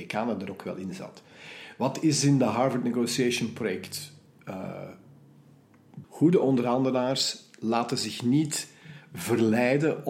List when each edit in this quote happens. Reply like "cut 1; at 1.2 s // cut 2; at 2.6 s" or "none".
cut 1; at 6.0 s